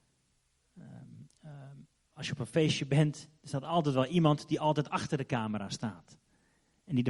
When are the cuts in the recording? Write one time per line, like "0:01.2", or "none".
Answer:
none